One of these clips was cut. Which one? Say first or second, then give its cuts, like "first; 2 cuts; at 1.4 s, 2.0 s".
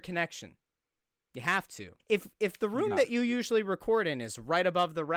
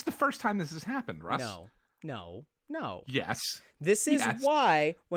first; 1 cut; at 2.0 s